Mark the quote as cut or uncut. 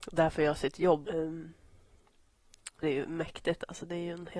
cut